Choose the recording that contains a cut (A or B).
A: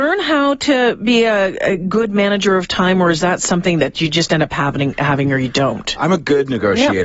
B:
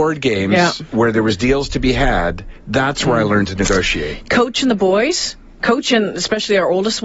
A